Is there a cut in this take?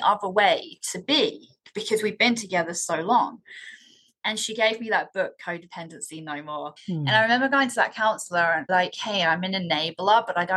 yes; 2 cuts; at 6.8 s, 8.7 s

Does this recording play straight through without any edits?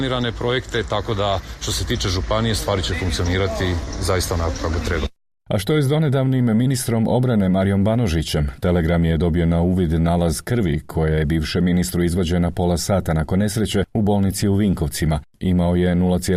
yes; 0 cuts

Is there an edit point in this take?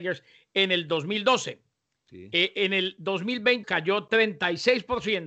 yes; 1 cut; at 3.6 s

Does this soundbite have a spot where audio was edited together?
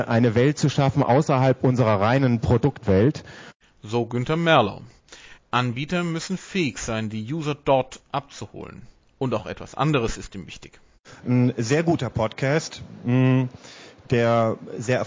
yes; 2 cuts; at 5.4 s, 9.1 s

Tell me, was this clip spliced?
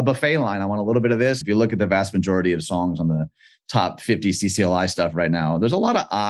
yes; 1 cut; at 1.4 s

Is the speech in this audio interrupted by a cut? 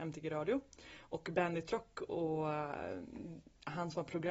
no; 0 cuts

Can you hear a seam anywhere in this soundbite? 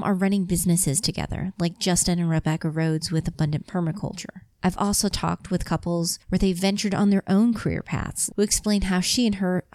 yes; 2 cuts; at 4.5 s, 8.3 s

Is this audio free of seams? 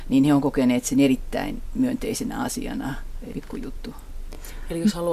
no; 1 cut; at 3.3 s

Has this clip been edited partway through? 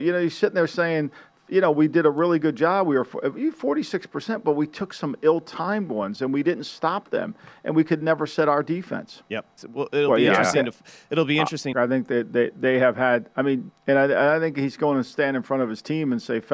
yes; 3 cuts; at 9.6 s, 11.7 s, 13.7 s

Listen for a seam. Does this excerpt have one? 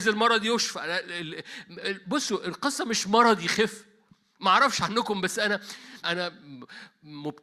yes; 1 cut; at 6.0 s

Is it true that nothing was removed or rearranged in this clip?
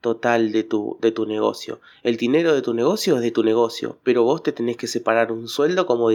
yes; 0 cuts

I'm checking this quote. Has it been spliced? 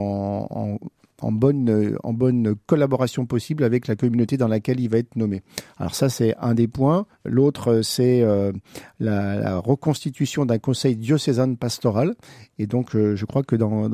yes; 1 cut; at 7.1 s

